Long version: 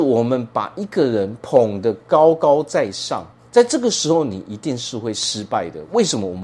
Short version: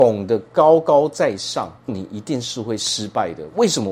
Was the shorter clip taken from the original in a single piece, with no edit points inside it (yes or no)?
no